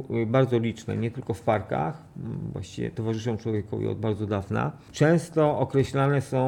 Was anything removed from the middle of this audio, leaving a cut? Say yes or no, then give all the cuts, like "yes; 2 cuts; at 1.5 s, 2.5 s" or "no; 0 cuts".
no; 0 cuts